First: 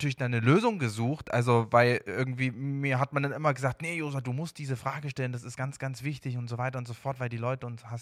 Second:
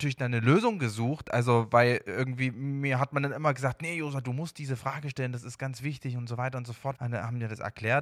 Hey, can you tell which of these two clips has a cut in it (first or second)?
second